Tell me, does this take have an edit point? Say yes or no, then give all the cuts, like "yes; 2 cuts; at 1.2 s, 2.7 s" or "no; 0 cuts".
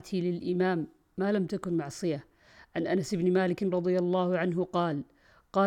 no; 0 cuts